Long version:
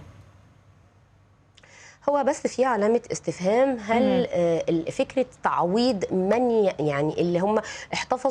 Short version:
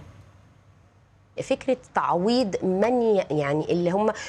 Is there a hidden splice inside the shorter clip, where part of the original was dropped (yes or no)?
yes